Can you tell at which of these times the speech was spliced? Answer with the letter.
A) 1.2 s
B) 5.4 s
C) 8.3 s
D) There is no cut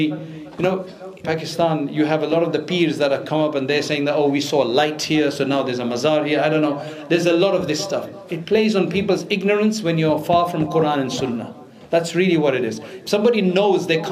A